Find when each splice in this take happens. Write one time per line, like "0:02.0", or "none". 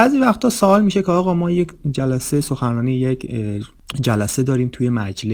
none

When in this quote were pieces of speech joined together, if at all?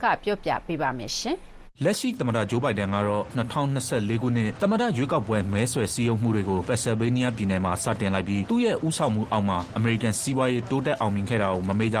0:01.7

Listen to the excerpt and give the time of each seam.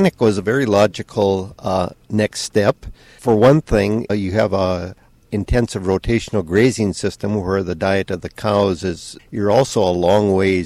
0:04.1
0:09.2

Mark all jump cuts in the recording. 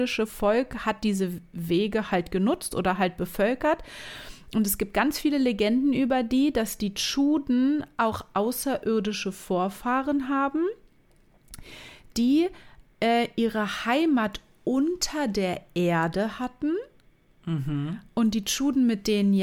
none

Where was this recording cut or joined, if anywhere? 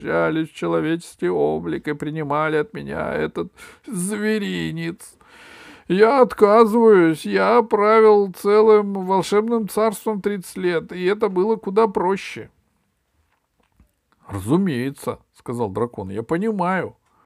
none

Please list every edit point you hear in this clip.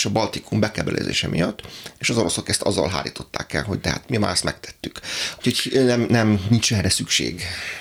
0:05.4

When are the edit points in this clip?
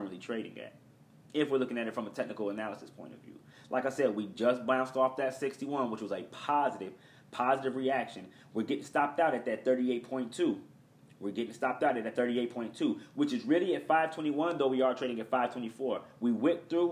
none

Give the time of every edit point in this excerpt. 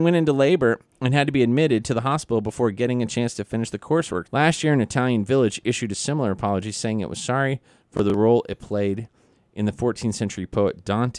0:04.2

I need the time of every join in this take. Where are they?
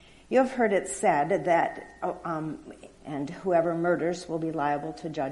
0:02.9

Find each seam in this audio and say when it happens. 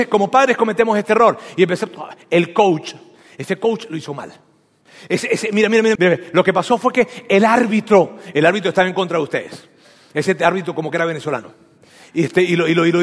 0:06.0

